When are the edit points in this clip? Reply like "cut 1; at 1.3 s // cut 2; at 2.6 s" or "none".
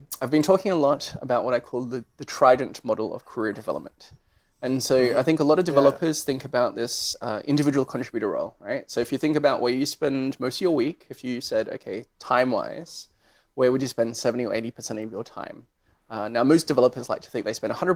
none